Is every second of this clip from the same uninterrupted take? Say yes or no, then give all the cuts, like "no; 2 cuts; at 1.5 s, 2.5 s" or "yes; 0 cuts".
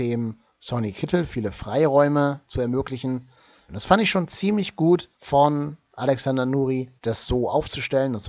no; 3 cuts; at 3.7 s, 5.1 s, 7.0 s